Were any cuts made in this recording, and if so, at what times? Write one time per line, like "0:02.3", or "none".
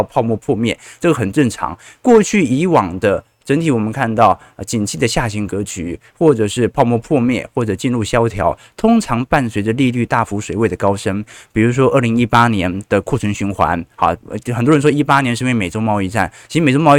none